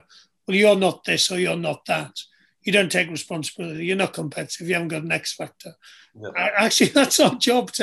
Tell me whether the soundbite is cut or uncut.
uncut